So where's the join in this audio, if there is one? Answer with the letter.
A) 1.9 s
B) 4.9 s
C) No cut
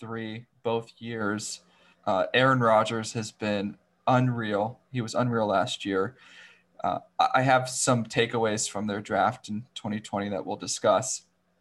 A